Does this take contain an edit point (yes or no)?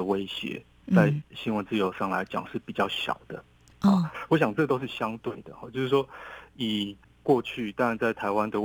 no